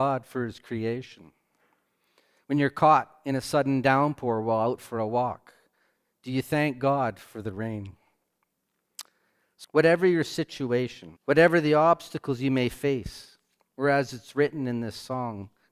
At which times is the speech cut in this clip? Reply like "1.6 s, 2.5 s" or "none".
9.6 s, 11.2 s, 13.7 s